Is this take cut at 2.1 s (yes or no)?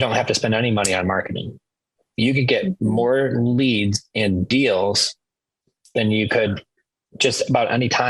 no